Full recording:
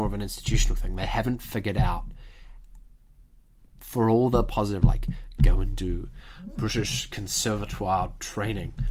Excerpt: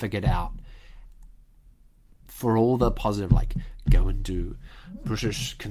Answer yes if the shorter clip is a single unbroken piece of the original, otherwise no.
yes